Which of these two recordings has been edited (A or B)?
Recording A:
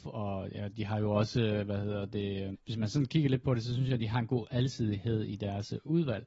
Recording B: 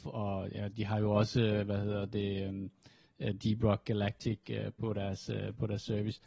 A